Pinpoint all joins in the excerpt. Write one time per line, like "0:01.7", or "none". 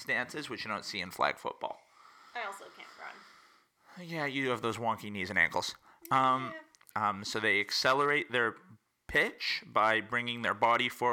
0:06.9